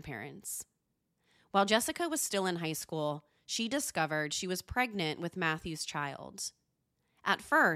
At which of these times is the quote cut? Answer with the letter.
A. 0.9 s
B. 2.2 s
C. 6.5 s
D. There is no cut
D